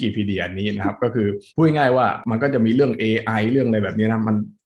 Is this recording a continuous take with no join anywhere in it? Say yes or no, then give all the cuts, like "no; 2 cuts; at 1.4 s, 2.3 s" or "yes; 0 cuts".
no; 1 cut; at 1.5 s